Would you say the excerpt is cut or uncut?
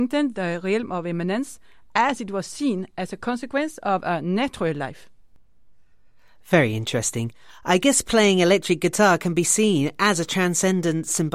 uncut